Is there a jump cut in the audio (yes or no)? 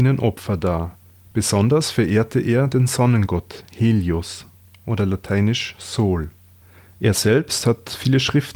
no